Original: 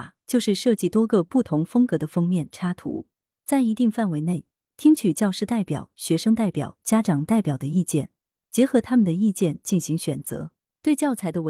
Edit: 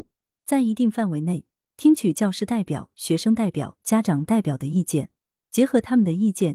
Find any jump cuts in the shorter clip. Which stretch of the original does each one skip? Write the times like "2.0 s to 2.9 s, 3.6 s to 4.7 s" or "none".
none